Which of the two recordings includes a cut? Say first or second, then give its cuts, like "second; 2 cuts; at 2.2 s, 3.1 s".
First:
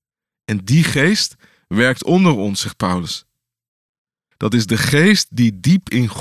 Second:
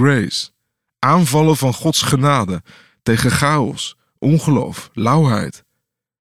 first; 1 cut; at 4.3 s